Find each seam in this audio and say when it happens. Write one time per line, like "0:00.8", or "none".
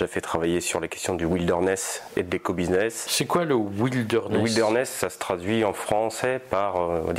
none